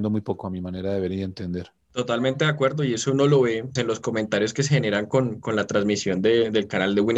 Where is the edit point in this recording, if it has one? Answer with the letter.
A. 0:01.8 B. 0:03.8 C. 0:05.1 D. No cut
B